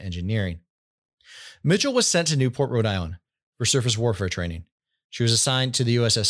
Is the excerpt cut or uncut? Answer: uncut